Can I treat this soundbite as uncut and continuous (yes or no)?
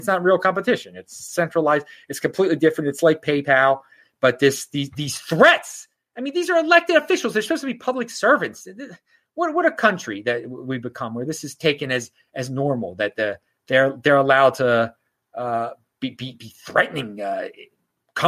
yes